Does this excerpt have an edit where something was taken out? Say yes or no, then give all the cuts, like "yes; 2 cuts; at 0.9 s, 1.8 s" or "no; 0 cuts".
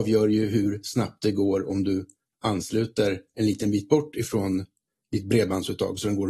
no; 0 cuts